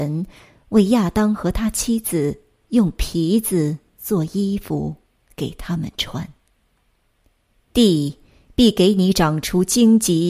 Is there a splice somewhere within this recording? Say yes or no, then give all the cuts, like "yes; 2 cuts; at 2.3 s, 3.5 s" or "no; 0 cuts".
yes; 1 cut; at 7.7 s